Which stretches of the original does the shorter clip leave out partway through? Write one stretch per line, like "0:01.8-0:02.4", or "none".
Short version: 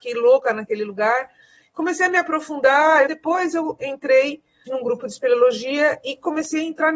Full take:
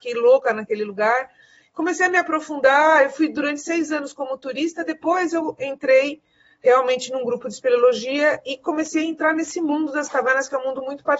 0:03.1-0:04.9
0:06.5-0:07.1